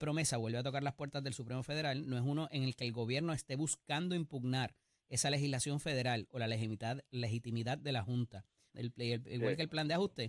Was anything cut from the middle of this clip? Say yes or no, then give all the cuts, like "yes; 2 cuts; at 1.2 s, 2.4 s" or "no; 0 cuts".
yes; 1 cut; at 8.7 s